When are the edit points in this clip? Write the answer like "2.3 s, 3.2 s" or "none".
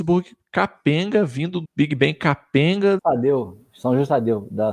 1.6 s, 3.0 s